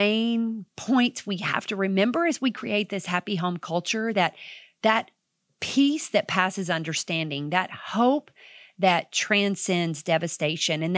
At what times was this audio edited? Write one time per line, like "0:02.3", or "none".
none